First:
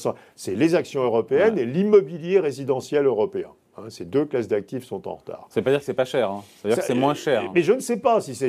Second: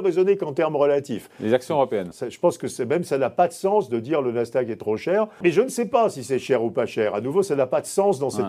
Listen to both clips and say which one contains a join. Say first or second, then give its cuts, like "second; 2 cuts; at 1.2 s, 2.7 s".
second; 2 cuts; at 2.1 s, 5.4 s